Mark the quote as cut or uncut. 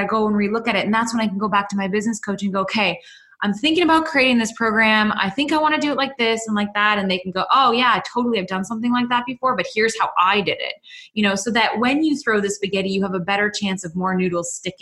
uncut